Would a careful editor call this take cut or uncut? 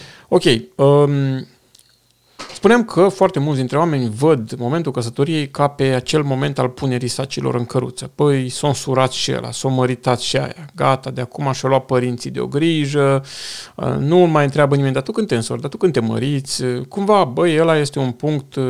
uncut